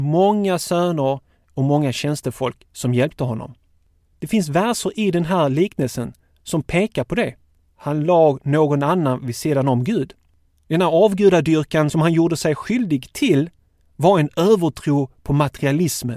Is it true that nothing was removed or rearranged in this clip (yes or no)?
no